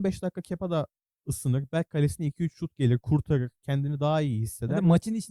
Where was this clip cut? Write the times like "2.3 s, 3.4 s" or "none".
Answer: none